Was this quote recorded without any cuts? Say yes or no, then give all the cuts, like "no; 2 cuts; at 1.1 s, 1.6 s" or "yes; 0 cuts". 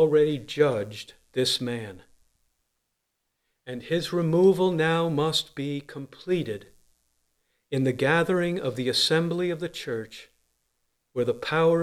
yes; 0 cuts